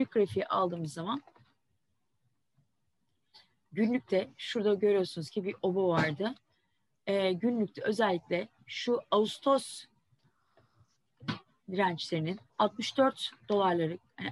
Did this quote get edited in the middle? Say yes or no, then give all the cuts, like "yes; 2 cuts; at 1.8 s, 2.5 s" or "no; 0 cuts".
yes; 1 cut; at 12.5 s